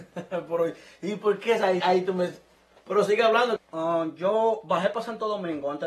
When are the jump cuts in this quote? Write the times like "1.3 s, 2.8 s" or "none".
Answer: 1.8 s, 3.6 s